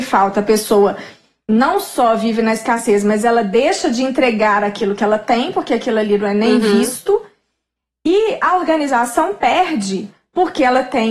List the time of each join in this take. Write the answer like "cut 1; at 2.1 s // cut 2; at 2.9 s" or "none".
none